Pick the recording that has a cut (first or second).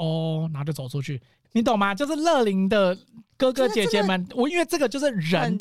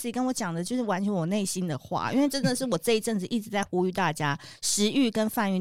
first